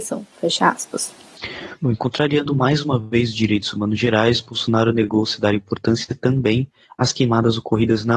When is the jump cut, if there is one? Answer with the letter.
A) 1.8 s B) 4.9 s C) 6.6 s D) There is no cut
D